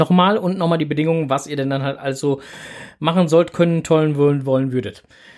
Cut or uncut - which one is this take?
uncut